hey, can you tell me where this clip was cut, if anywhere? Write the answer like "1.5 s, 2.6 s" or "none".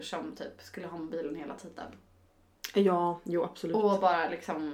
none

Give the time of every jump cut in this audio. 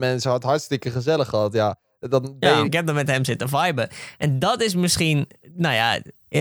2.6 s

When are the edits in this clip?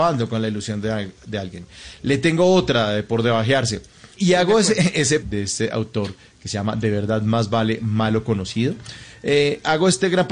4.2 s, 5.2 s

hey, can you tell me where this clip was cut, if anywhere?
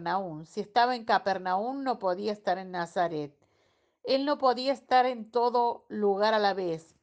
none

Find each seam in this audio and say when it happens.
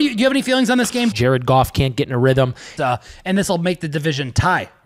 1.1 s, 2.8 s

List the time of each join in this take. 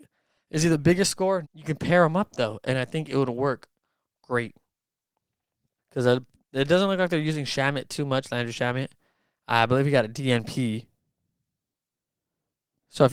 1.4 s, 5.8 s

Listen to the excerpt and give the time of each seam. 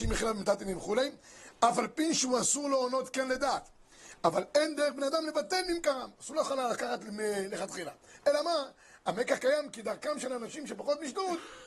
6.2 s

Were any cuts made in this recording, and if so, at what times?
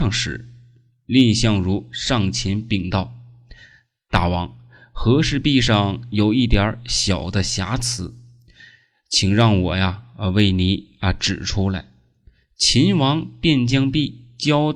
none

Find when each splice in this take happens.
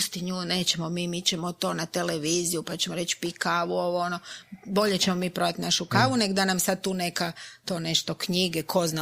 none

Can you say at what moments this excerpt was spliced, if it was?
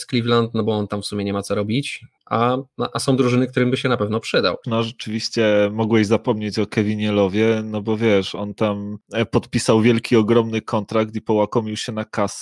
4.6 s

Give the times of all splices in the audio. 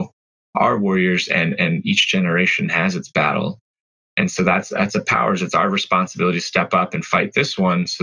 none

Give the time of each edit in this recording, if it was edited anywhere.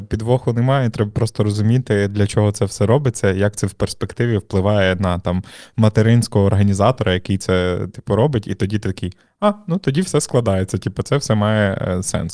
none

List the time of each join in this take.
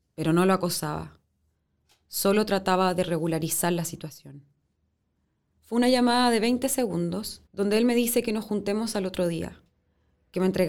5.6 s, 7.5 s

